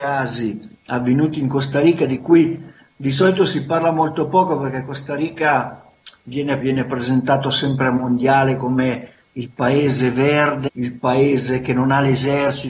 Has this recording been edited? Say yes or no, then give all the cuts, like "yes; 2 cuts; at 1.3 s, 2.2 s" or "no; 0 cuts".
yes; 2 cuts; at 6.6 s, 10.7 s